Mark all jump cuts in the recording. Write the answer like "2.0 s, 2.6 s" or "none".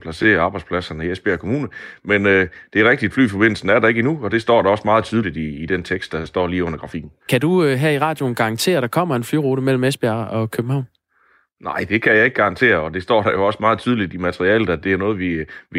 7.2 s